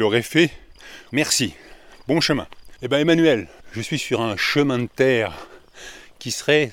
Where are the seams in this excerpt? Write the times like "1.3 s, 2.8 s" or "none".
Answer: 1.1 s, 3.6 s